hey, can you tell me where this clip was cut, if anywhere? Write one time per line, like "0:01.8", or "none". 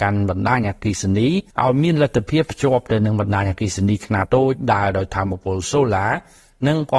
0:01.5
0:04.2